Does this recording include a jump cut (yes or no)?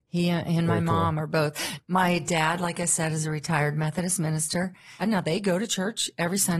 yes